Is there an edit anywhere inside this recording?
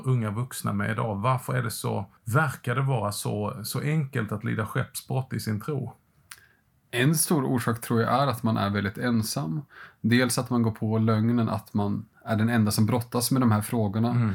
yes; 1 cut; at 2.2 s

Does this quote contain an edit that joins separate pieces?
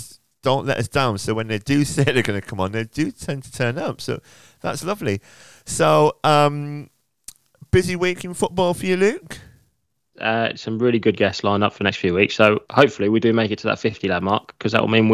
yes; 1 cut; at 10.1 s

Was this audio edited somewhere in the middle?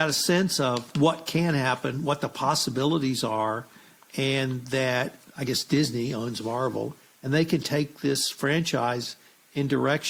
no; 0 cuts

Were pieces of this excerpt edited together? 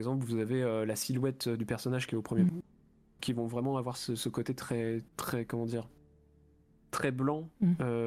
yes; 2 cuts; at 2.5 s, 5.1 s

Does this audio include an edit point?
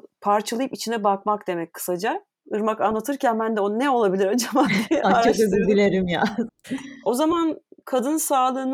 yes; 2 cuts; at 5.0 s, 6.6 s

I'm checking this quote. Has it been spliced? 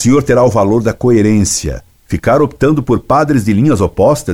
no; 0 cuts

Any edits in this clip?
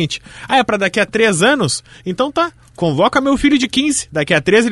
no; 0 cuts

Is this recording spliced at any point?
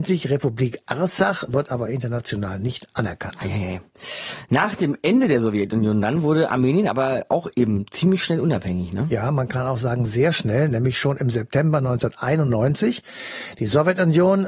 no; 0 cuts

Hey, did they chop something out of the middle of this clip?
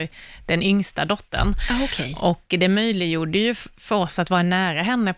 no; 0 cuts

